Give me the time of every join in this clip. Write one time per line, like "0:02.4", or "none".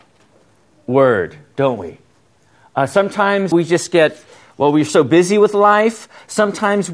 0:03.5